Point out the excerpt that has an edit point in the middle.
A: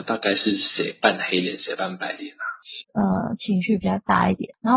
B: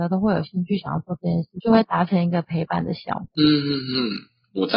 A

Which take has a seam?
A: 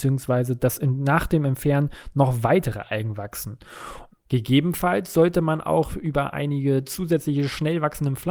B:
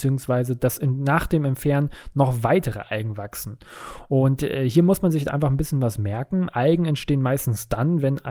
A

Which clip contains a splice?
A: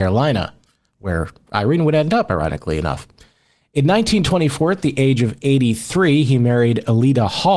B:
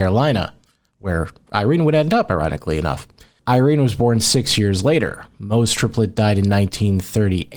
B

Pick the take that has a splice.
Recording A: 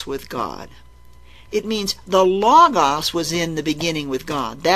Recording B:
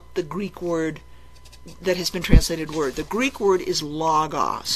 A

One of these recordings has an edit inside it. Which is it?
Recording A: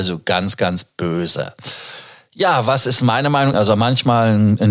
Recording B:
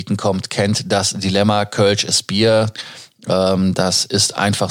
A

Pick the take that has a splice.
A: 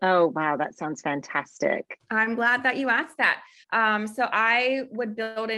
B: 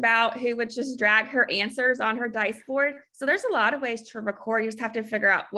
A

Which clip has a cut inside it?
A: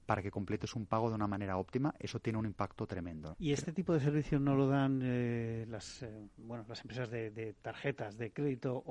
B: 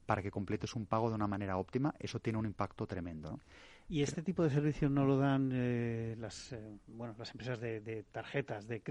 A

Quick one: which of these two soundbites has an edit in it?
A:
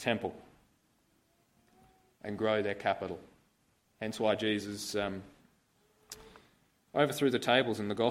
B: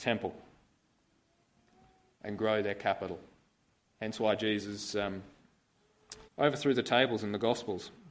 B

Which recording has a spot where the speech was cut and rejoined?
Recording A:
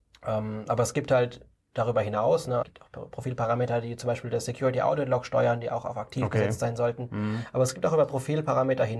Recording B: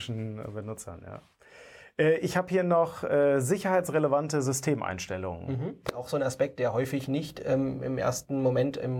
A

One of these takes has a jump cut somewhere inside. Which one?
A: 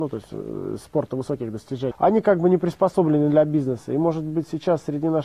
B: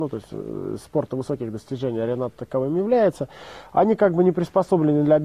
A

